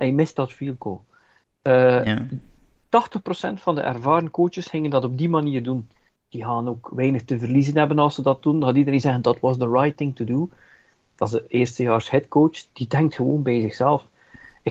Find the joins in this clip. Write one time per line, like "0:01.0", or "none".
0:06.1